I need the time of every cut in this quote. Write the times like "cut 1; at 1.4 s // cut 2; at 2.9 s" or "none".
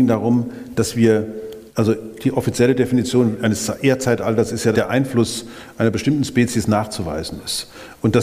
cut 1; at 1.7 s // cut 2; at 4.7 s